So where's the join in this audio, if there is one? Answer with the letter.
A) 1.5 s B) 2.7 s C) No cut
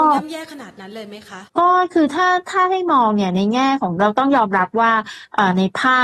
A